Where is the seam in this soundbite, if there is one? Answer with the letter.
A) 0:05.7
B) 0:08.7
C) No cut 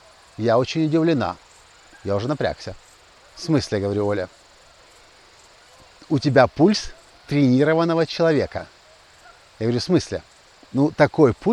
C